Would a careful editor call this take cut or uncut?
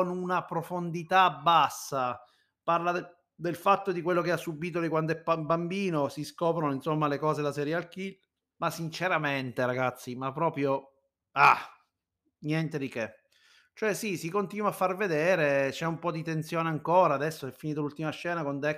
cut